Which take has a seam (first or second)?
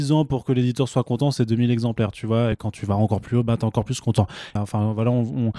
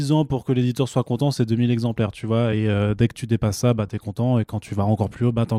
first